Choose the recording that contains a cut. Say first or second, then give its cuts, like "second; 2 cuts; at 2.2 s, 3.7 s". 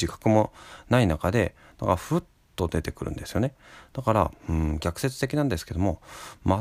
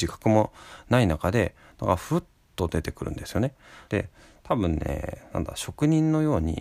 second; 1 cut; at 3.9 s